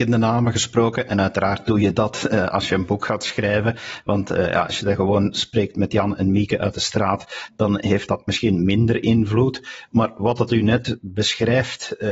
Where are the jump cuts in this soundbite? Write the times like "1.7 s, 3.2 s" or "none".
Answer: none

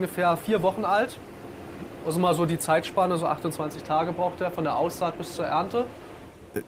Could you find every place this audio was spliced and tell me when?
none

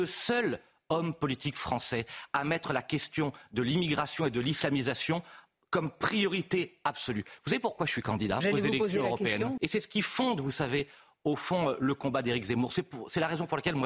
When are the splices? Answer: 8.4 s, 9.6 s

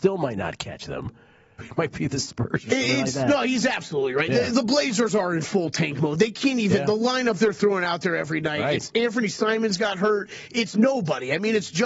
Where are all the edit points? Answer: 1.6 s

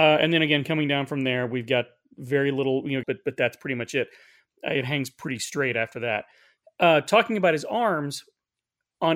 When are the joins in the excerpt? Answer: 3.0 s

